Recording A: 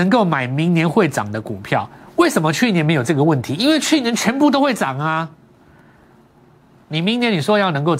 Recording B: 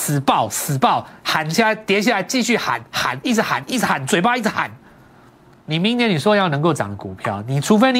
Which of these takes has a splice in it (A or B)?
B